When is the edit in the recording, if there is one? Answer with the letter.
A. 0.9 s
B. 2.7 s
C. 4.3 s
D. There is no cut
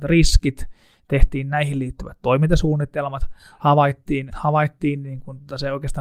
C